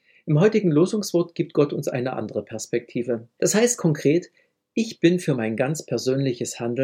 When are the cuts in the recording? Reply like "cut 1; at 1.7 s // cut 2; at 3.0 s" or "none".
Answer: cut 1; at 3.4 s